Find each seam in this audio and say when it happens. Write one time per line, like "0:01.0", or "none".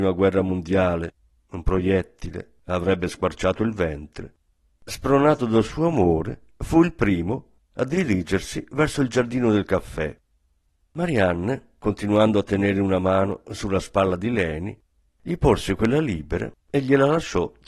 0:07.6